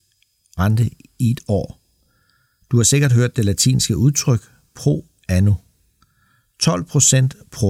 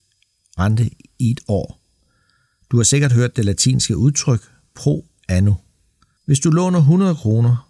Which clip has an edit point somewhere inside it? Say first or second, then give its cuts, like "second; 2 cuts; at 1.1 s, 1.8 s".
second; 1 cut; at 6.2 s